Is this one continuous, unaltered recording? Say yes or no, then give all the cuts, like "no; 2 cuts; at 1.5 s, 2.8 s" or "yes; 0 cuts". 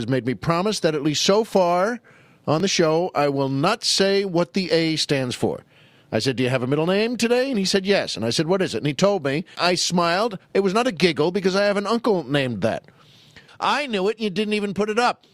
no; 2 cuts; at 9.5 s, 13.5 s